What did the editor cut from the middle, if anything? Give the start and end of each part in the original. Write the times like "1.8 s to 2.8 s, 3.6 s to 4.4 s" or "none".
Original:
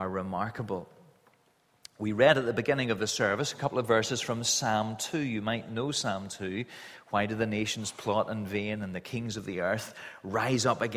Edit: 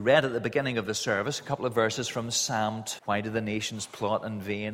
5.1 s to 7.0 s

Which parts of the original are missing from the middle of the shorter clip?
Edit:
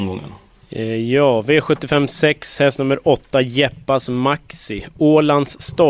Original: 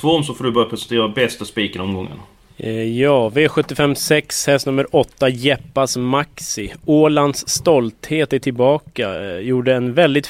none

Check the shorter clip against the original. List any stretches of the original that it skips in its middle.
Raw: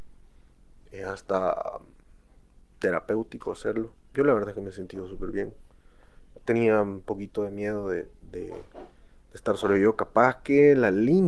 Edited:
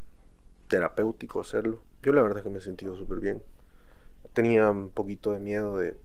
none

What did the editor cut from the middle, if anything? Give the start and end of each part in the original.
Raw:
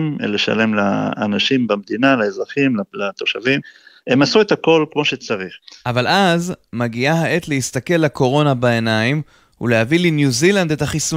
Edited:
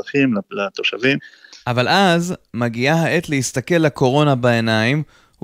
3.9 s to 5.7 s

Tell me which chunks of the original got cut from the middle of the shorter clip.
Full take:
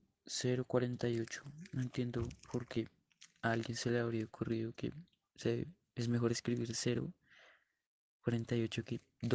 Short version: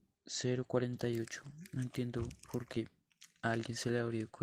none

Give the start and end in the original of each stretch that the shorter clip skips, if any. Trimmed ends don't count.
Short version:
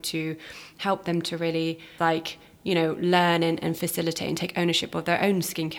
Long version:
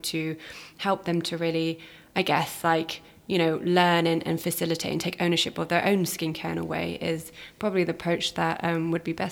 2.0 s to 2.6 s

